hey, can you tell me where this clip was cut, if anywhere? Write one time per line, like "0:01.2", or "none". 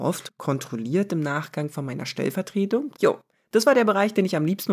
0:02.9